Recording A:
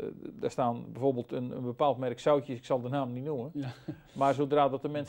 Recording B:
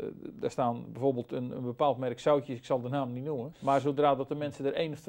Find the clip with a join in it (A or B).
B